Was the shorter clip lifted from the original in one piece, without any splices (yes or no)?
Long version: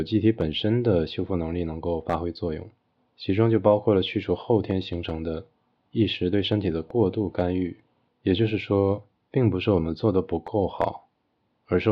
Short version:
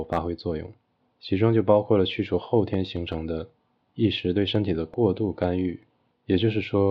yes